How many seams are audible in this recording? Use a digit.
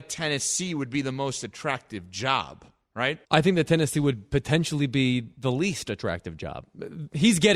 1